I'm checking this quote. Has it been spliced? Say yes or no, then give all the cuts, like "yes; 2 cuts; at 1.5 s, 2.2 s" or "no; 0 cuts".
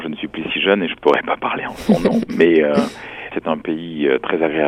yes; 1 cut; at 3.3 s